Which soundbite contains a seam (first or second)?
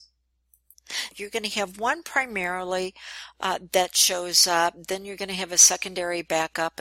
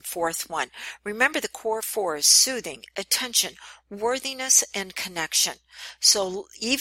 first